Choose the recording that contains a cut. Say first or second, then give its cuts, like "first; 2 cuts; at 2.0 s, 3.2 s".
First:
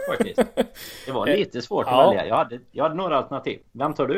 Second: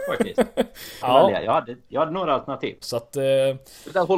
second; 2 cuts; at 1.0 s, 2.8 s